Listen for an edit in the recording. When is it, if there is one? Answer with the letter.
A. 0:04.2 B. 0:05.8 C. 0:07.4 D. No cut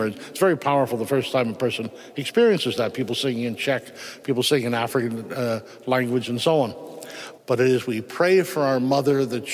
C